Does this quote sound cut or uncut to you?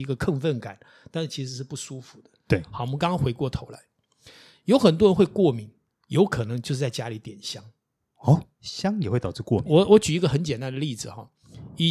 uncut